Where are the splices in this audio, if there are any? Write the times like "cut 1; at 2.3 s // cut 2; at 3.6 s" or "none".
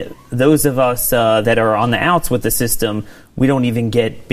cut 1; at 1.4 s